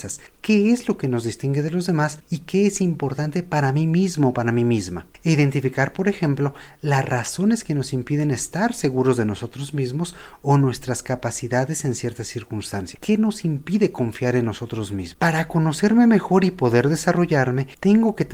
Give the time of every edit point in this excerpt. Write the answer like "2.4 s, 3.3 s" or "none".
13.0 s